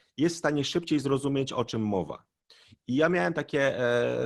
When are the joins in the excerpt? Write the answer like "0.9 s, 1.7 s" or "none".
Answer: none